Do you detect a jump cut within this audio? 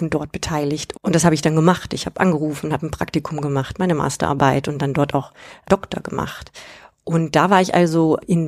yes; 1 cut; at 0.9 s

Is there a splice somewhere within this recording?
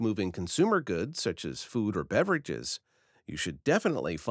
no; 0 cuts

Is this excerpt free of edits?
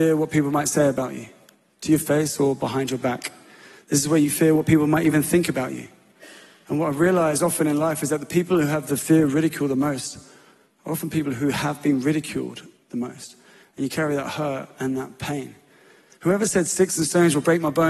yes; 0 cuts

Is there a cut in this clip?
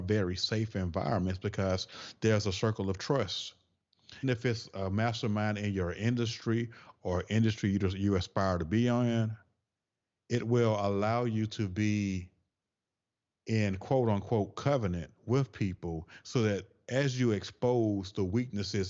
yes; 1 cut; at 4.2 s

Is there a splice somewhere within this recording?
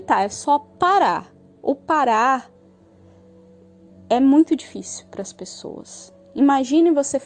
no; 0 cuts

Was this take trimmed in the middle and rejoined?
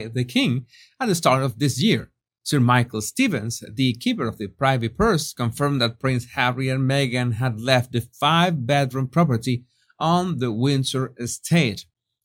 no; 0 cuts

